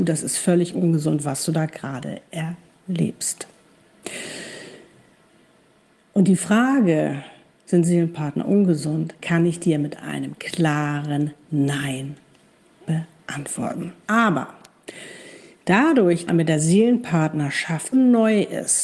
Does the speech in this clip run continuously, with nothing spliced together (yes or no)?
no